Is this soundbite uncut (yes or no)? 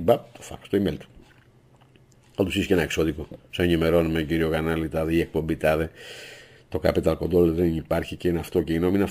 yes